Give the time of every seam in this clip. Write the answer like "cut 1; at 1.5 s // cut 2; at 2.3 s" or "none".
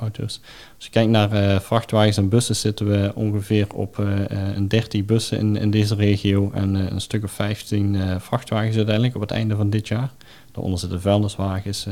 none